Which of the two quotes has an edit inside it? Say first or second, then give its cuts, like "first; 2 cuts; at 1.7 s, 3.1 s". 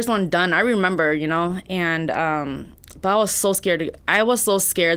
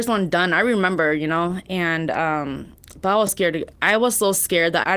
second; 1 cut; at 3.3 s